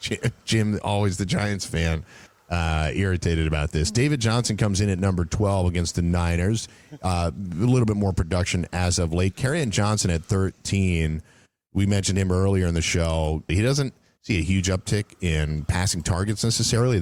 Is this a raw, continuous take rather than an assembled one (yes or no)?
no